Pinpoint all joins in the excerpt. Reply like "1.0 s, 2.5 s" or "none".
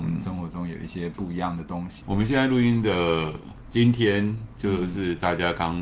2.0 s